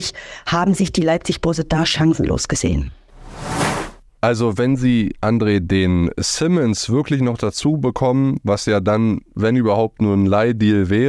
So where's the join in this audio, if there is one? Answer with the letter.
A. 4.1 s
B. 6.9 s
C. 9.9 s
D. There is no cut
A